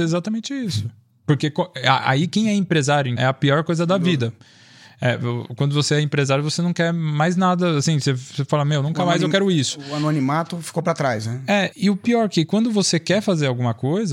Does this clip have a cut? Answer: yes; 2 cuts; at 3.2 s, 11.7 s

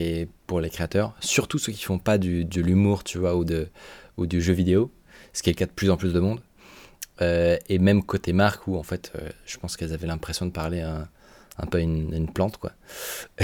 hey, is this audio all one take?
yes; 0 cuts

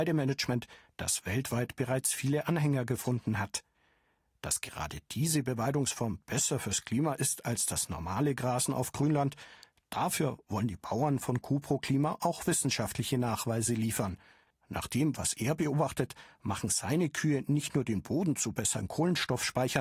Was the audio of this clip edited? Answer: yes; 1 cut; at 14.5 s

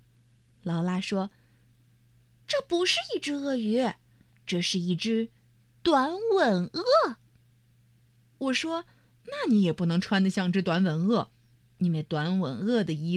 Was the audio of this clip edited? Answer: no; 0 cuts

